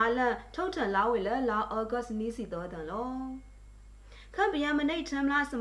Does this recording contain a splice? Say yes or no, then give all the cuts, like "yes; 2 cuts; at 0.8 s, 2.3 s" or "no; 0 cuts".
no; 0 cuts